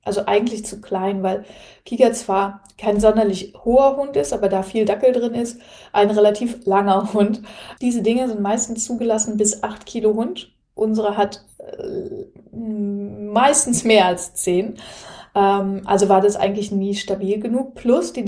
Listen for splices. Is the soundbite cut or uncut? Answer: cut